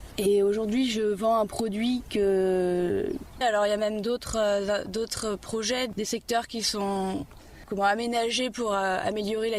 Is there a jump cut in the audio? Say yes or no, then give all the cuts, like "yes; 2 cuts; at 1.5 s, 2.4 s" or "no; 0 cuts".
yes; 2 cuts; at 3.4 s, 5.9 s